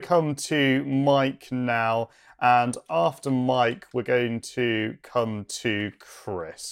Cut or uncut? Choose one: uncut